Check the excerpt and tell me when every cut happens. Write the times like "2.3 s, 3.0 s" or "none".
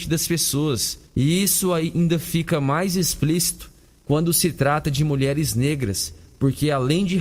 1.1 s